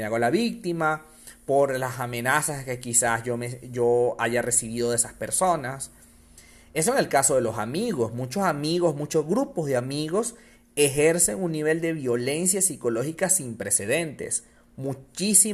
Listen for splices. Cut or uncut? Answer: uncut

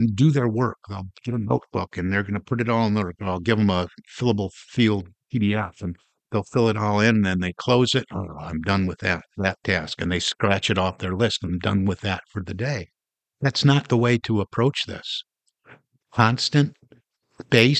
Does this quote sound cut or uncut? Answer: uncut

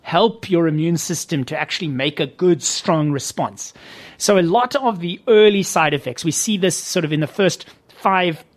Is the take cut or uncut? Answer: uncut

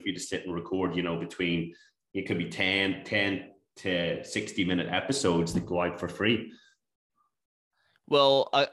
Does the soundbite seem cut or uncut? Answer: uncut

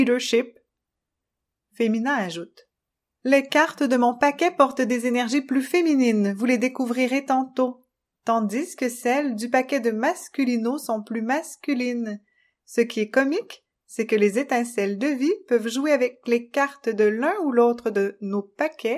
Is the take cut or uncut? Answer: uncut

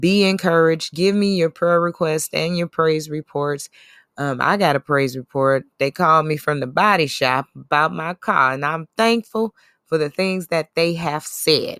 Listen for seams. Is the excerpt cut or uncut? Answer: uncut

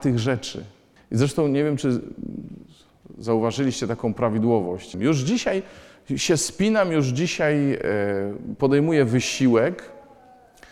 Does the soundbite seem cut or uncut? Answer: cut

